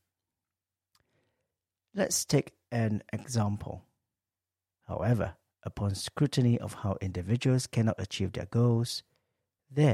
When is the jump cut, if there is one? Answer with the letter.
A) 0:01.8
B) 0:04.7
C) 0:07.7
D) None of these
B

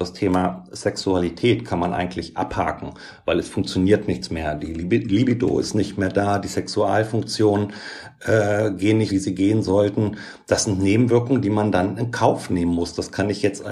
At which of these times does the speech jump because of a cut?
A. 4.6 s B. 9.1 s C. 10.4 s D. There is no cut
B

